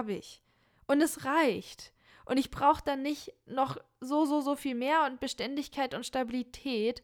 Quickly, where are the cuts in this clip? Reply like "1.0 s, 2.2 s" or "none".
none

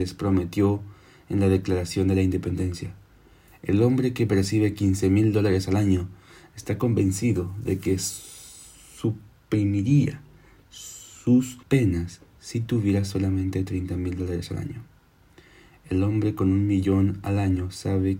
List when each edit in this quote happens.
11.6 s

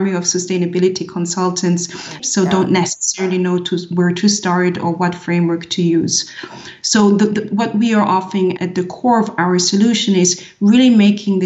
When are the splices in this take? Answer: 2.2 s, 8.6 s

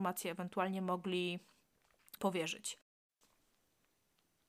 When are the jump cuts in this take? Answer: 2.2 s

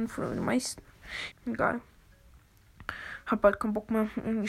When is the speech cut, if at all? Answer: 1.3 s

